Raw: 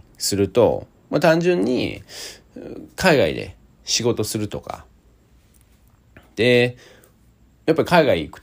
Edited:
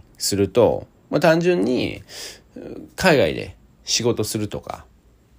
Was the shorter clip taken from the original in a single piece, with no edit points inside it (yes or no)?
yes